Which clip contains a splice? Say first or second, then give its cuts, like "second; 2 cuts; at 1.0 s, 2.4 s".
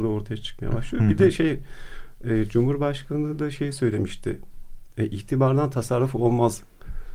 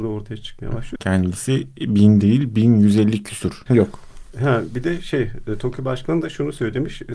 second; 2 cuts; at 1.0 s, 3.7 s